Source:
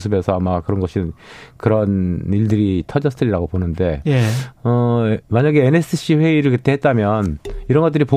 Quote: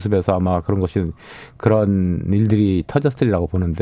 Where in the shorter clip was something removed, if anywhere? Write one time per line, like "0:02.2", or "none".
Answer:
none